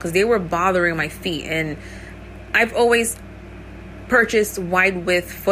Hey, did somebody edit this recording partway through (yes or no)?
no